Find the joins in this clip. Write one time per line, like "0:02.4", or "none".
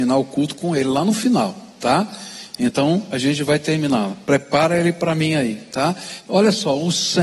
none